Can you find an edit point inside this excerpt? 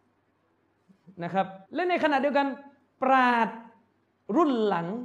yes; 1 cut; at 1.7 s

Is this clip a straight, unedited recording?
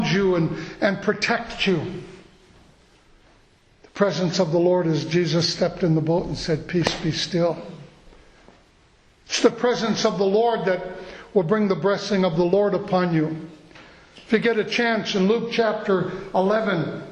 yes; 0 cuts

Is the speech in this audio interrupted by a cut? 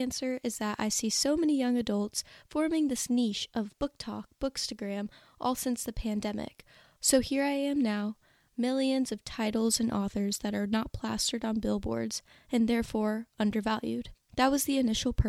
yes; 2 cuts; at 7.0 s, 8.5 s

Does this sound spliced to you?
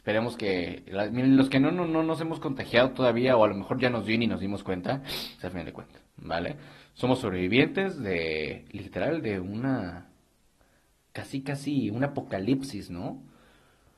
yes; 1 cut; at 5.4 s

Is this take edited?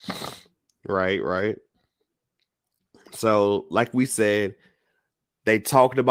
no; 0 cuts

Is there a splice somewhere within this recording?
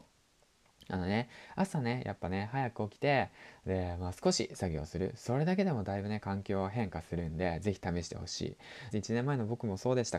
yes; 1 cut; at 8.9 s

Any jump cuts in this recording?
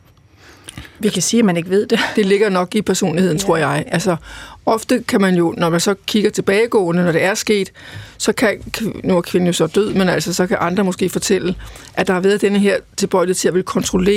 no; 0 cuts

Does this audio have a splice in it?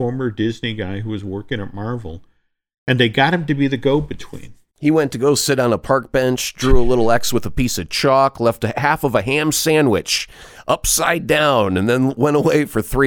no; 0 cuts

